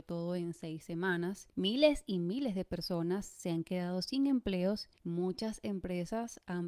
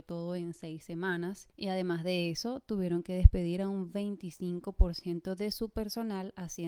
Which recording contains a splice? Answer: first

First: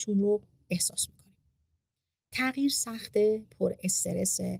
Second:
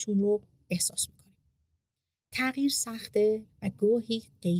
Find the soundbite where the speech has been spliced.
second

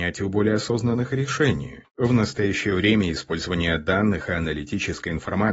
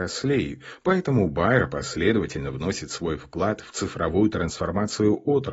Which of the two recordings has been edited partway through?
first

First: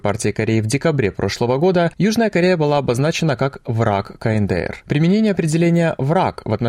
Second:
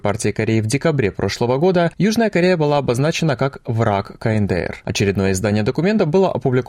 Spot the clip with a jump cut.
second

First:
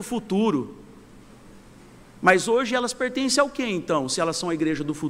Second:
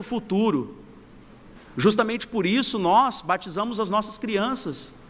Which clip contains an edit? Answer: second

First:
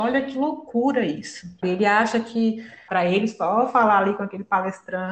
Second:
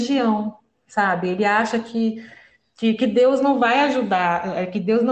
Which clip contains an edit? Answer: first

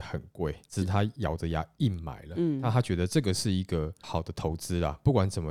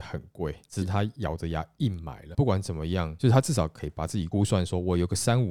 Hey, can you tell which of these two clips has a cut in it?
second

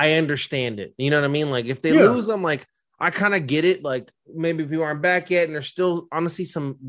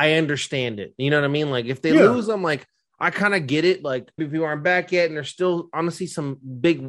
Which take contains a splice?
second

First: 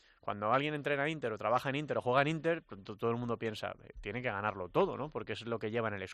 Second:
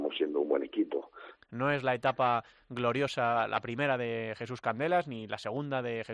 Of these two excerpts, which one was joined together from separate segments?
second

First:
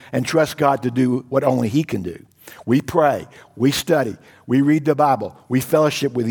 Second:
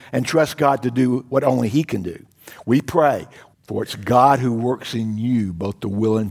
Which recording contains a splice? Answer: second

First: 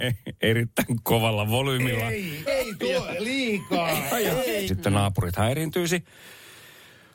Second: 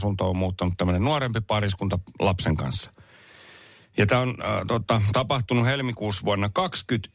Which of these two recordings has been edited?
first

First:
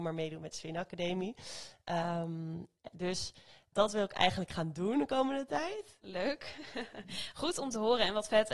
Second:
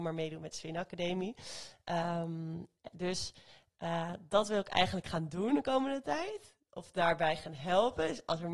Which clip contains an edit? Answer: first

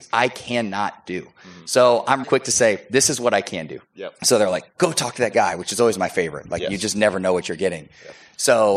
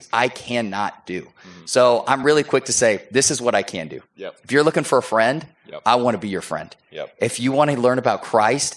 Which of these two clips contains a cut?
first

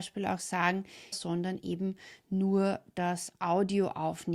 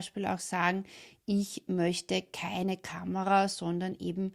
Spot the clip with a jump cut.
first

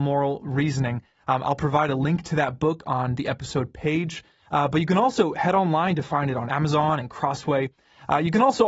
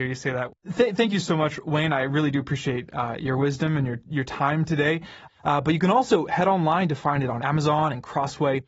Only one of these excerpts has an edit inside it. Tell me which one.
second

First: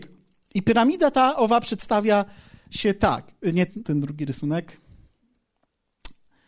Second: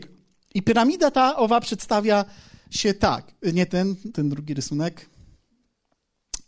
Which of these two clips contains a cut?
first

